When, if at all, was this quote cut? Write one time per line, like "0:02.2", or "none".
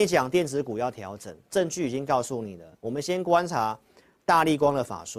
none